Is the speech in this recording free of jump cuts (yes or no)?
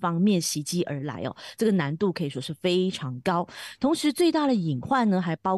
yes